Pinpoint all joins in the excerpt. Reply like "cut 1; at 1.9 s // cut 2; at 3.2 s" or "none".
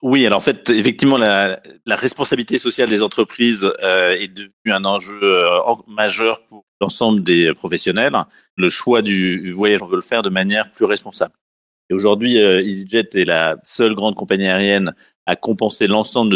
cut 1; at 6.7 s // cut 2; at 9.8 s